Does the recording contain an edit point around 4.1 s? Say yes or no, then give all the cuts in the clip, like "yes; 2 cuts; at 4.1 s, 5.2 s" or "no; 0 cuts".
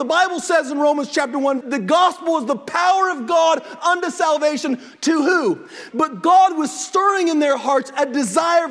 no; 2 cuts; at 1.6 s, 5.9 s